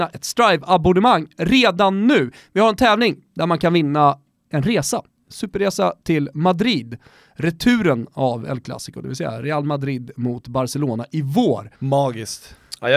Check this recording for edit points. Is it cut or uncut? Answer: cut